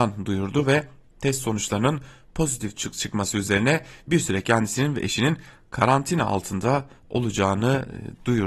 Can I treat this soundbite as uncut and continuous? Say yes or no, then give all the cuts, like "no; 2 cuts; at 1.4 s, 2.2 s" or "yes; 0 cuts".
yes; 0 cuts